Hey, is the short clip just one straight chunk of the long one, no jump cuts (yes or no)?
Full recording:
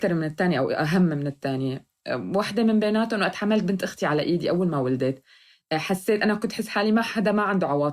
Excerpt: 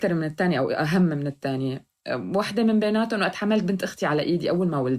yes